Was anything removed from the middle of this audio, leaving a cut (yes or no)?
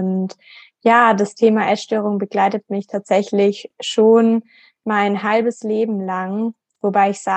no